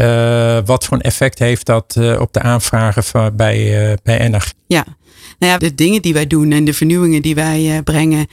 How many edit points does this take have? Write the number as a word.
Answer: two